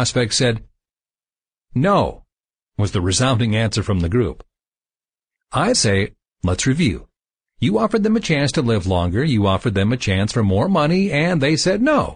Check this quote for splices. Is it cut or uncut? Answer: cut